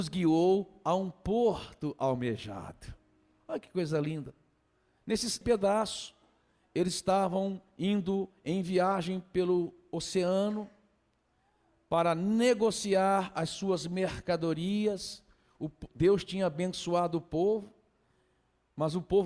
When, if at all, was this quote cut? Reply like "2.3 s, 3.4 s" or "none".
5.4 s